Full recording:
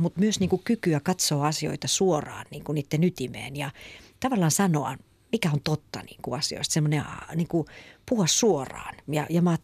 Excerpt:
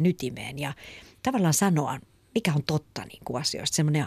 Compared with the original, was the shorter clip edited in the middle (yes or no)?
no